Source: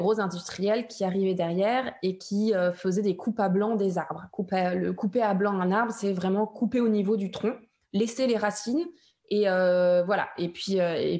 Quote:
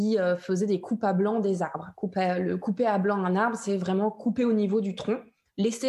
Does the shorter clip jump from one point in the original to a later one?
no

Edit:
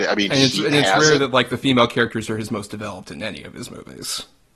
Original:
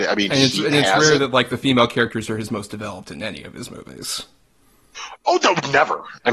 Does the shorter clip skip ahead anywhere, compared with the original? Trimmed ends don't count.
no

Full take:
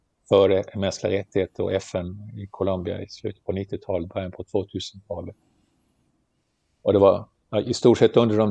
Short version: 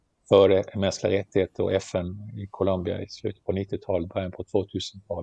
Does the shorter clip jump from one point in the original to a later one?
no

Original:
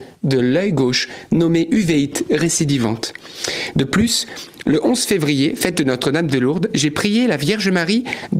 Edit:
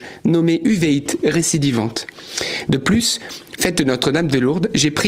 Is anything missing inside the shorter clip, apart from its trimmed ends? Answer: yes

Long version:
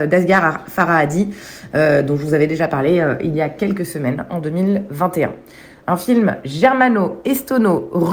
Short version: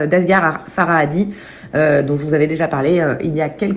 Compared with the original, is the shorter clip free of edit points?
yes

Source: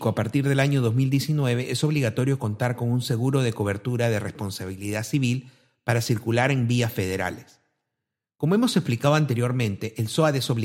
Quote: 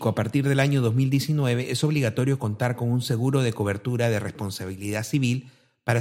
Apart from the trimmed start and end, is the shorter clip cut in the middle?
no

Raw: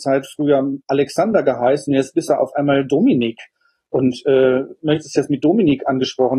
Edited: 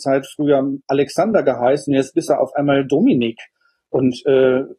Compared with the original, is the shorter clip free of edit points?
yes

